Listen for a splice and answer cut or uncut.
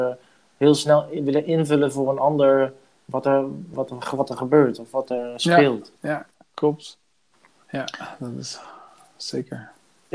cut